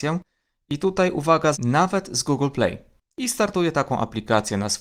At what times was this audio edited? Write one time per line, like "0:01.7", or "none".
0:01.5